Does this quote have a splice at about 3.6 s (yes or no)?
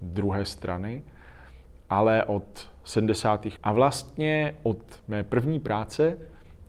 yes